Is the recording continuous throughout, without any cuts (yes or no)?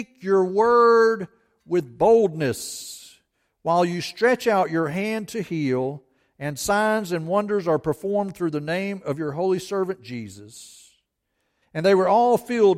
no